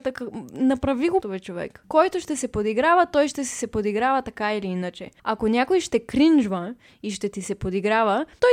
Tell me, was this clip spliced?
yes; 2 cuts; at 1.2 s, 5.2 s

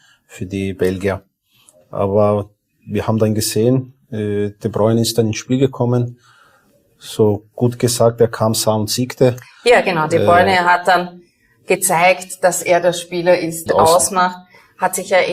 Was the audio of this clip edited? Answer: yes; 1 cut; at 13.7 s

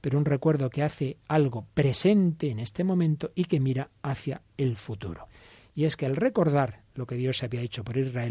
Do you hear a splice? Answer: no; 0 cuts

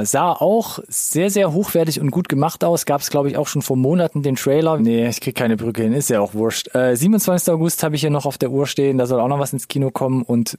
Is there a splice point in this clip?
yes; 1 cut; at 4.8 s

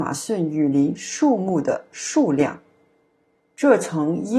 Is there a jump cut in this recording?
yes; 1 cut; at 3.4 s

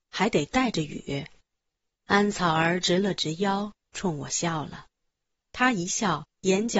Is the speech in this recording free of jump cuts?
no; 1 cut; at 3.8 s

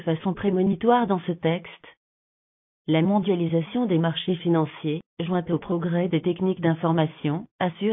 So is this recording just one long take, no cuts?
yes; 0 cuts

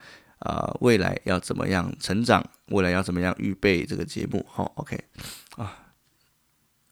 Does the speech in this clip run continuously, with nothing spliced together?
yes; 0 cuts

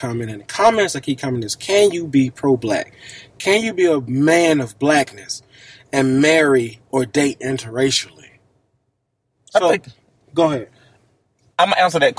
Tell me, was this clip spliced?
no; 0 cuts

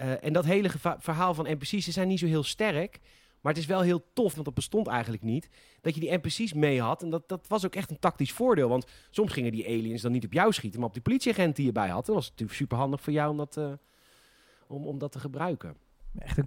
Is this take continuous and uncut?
no; 1 cut; at 4.3 s

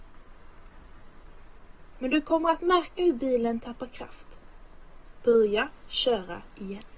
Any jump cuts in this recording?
yes; 2 cuts; at 1.9 s, 5.2 s

